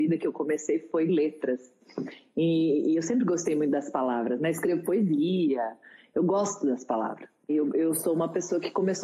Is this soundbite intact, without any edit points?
no; 1 cut; at 7.5 s

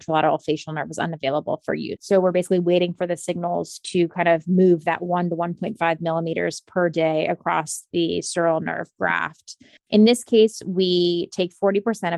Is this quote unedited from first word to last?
no; 2 cuts; at 2.0 s, 9.8 s

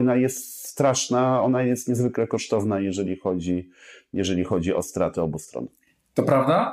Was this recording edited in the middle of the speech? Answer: no; 0 cuts

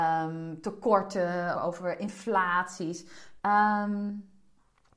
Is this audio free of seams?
no; 2 cuts; at 1.5 s, 3.4 s

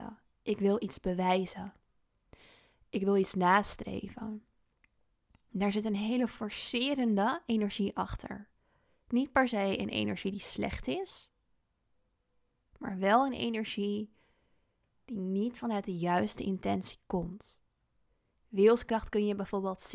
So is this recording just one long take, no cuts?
yes; 0 cuts

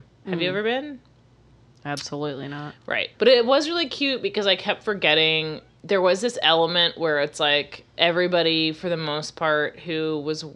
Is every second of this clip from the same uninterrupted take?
no; 1 cut; at 3.1 s

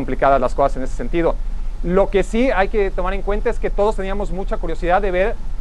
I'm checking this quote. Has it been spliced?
no; 0 cuts

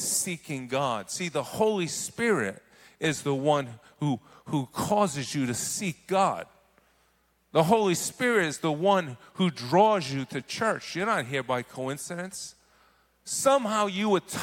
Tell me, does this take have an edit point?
no; 0 cuts

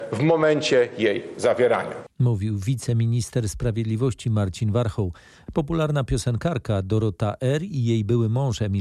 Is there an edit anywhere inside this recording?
yes; 1 cut; at 5.5 s

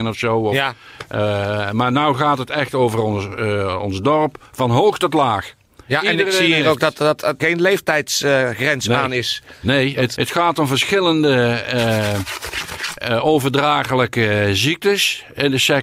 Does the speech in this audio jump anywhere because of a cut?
yes; 2 cuts; at 7.4 s, 10.1 s

